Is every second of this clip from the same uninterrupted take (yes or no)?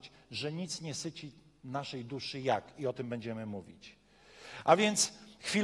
yes